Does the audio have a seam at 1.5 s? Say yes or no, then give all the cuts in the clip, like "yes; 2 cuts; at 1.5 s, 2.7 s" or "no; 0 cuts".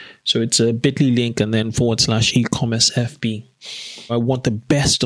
no; 1 cut; at 4.1 s